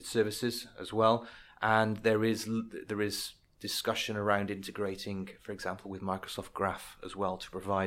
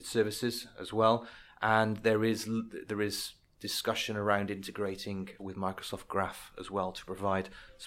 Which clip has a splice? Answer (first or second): second